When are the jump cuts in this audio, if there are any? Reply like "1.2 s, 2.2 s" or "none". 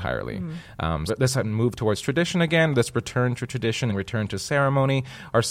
1.1 s, 3.9 s